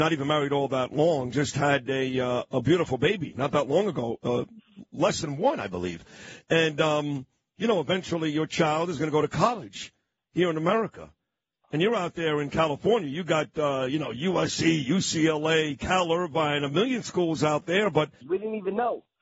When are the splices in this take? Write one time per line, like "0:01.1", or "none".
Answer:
0:18.2